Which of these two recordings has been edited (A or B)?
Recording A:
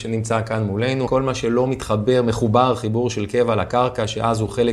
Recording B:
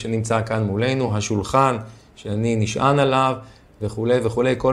A